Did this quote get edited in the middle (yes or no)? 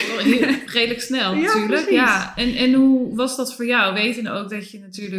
no